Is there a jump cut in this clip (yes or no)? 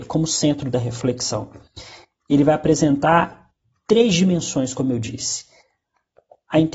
no